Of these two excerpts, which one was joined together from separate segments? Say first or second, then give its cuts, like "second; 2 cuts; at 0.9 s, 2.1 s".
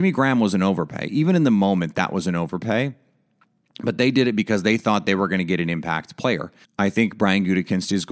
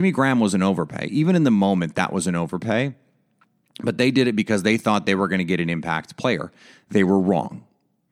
first; 1 cut; at 6.6 s